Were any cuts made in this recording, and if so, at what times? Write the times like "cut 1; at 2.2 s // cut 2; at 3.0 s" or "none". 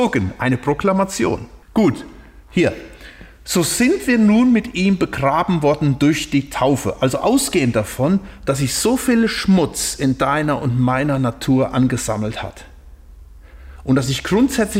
cut 1; at 1.6 s

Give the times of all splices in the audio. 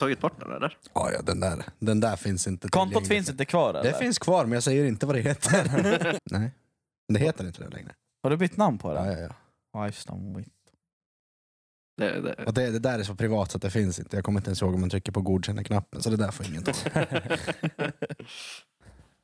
cut 1; at 6.2 s

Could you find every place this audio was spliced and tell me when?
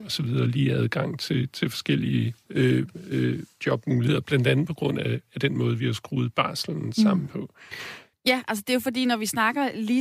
cut 1; at 8.1 s

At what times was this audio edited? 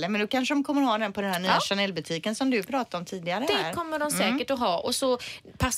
none

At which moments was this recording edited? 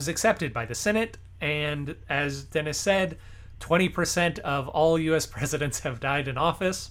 none

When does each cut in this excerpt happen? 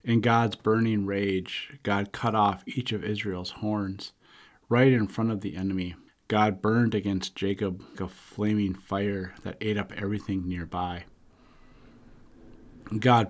cut 1; at 6.1 s // cut 2; at 7.9 s

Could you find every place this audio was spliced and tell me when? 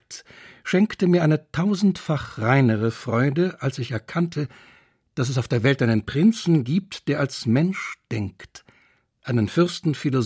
none

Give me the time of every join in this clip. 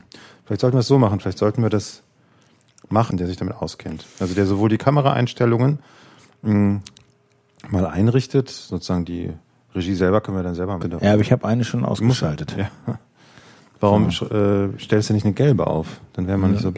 cut 1; at 3.1 s // cut 2; at 10.8 s

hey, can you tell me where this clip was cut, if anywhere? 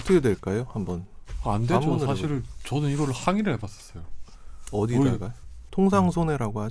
cut 1; at 5.7 s

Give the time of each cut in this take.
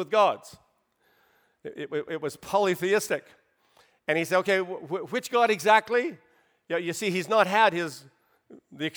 none

